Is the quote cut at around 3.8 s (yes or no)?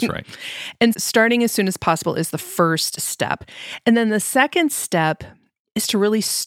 no